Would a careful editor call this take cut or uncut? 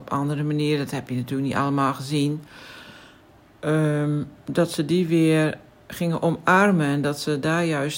uncut